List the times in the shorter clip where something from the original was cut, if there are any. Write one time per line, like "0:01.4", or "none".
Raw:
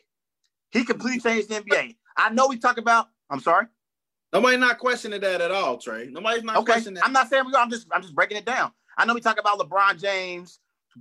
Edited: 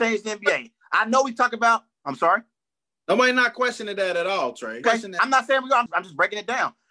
0:04.8
0:05.9